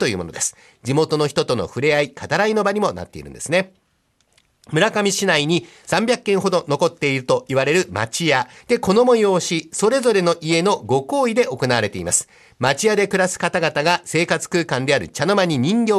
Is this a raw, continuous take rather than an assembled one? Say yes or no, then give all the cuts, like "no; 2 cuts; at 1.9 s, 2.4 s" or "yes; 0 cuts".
no; 1 cut; at 8.6 s